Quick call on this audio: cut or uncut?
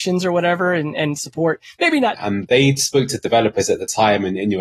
cut